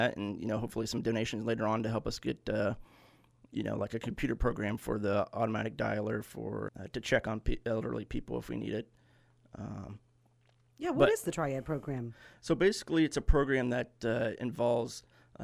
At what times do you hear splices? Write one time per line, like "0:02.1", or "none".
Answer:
0:06.7